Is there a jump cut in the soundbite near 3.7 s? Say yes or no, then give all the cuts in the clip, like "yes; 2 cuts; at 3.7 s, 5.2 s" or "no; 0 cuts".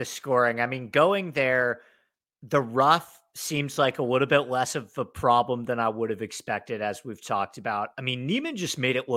no; 0 cuts